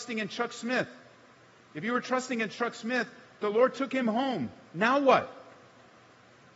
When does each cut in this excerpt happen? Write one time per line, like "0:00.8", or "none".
none